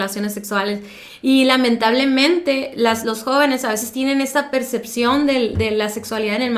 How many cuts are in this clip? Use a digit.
0